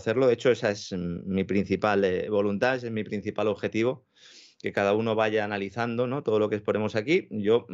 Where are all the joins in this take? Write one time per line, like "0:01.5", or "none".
none